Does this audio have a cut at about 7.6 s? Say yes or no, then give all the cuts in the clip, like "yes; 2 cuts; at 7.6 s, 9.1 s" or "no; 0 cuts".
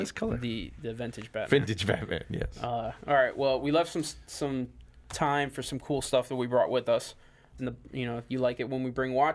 yes; 1 cut; at 7.6 s